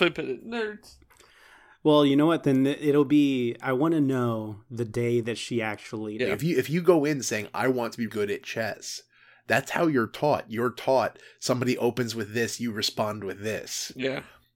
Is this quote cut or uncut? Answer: cut